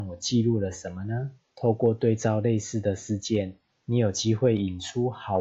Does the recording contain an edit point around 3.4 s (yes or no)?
no